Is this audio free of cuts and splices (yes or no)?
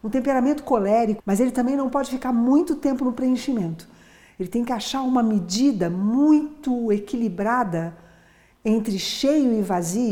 no